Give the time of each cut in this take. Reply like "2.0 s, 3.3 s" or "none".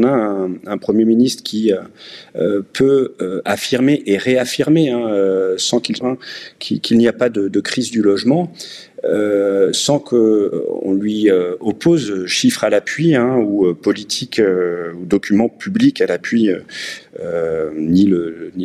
6.0 s, 17.0 s